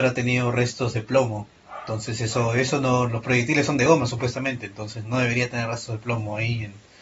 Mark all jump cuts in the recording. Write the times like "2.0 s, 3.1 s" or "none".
5.0 s